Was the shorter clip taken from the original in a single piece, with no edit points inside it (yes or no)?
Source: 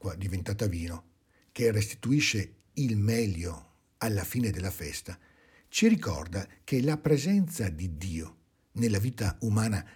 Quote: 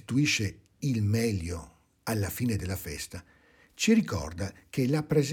yes